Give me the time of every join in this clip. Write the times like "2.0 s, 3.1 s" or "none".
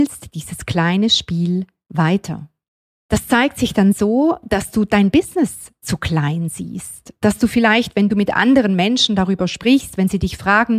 none